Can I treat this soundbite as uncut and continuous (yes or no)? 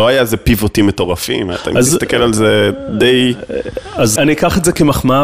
no